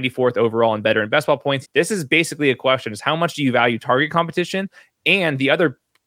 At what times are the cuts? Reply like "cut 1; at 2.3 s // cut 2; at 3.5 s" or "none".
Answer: cut 1; at 1.6 s